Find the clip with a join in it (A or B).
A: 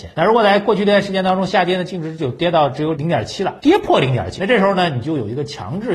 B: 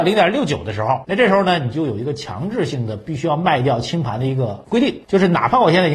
A